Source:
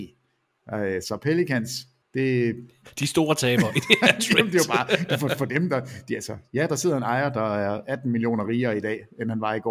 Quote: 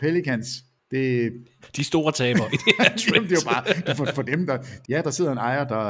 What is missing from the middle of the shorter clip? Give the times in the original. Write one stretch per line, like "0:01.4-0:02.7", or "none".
0:06.1-0:06.5